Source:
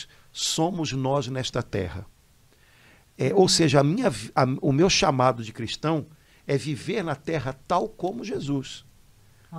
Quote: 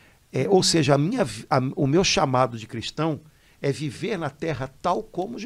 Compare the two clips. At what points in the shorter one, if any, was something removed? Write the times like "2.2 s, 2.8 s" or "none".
none